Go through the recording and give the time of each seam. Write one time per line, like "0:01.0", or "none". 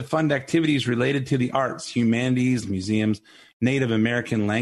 0:02.6